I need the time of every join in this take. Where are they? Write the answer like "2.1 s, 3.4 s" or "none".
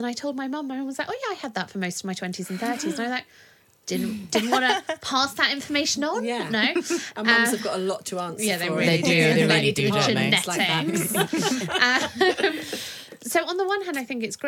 none